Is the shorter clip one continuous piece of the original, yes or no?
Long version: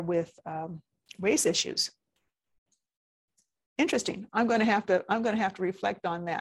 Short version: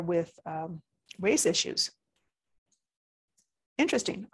yes